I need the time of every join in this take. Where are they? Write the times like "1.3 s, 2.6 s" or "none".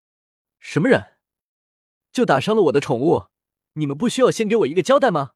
2.0 s